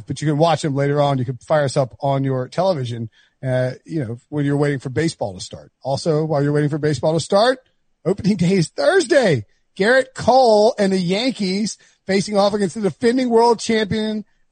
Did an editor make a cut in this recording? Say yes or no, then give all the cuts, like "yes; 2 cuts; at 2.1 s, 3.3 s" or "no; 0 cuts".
no; 0 cuts